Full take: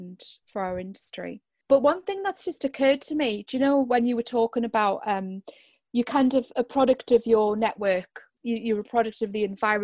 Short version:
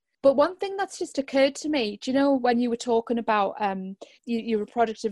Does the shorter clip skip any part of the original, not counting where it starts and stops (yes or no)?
yes